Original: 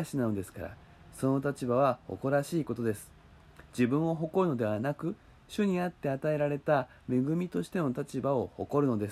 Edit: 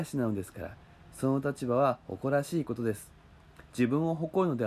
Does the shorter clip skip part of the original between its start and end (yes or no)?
no